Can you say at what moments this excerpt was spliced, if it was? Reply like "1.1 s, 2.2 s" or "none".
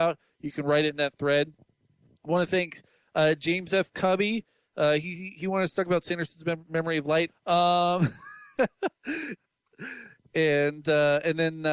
7.3 s, 9.4 s